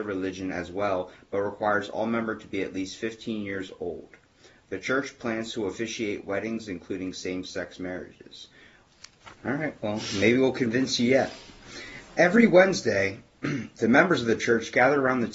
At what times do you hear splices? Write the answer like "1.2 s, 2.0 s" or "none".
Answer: 9.3 s